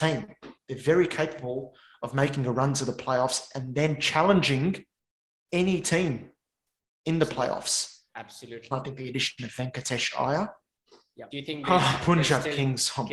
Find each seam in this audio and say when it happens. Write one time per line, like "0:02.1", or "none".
0:08.7
0:11.3